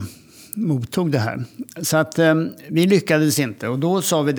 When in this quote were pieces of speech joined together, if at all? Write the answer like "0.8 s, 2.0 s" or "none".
none